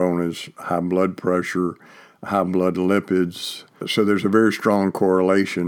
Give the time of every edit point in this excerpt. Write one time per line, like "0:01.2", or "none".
0:03.8